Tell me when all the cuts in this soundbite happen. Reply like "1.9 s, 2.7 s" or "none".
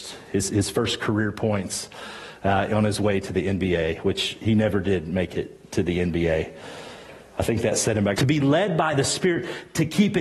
8.2 s